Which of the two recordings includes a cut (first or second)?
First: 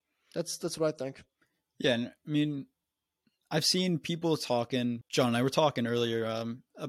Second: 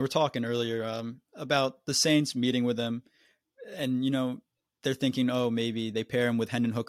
first